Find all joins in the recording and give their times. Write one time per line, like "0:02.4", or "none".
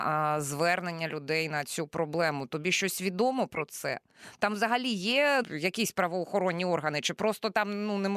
0:05.4